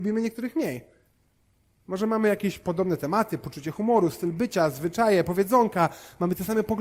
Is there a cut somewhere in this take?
no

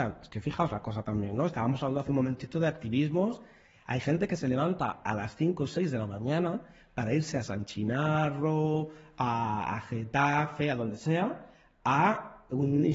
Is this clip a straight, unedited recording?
yes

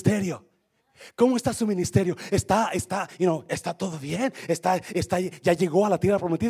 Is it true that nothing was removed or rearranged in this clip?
yes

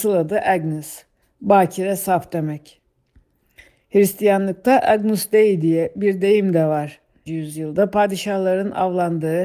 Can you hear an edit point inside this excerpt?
yes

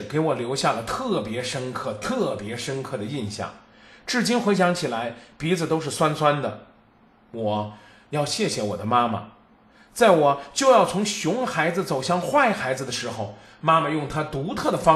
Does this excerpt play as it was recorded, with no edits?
yes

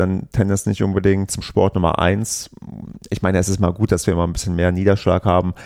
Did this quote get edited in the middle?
yes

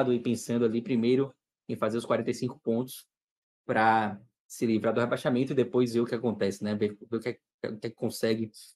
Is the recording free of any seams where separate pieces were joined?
yes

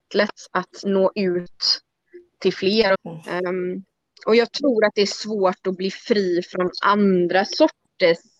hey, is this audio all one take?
no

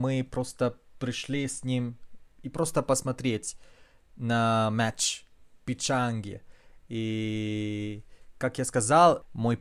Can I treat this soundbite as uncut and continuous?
yes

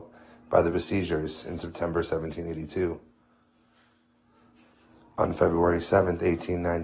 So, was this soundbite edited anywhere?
no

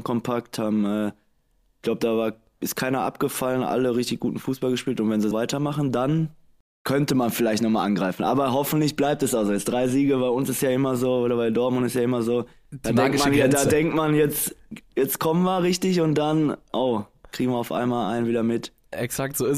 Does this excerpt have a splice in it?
yes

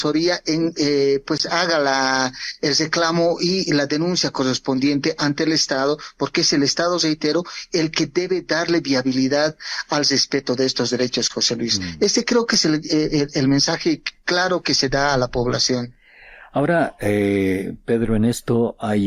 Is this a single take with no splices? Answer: yes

